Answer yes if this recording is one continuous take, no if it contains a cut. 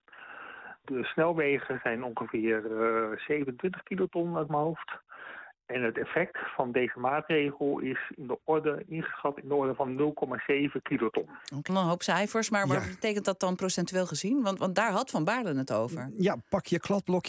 no